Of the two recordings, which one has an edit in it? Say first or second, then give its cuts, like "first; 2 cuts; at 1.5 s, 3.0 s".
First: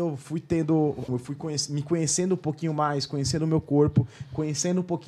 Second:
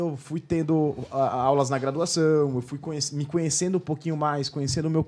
first; 1 cut; at 1.1 s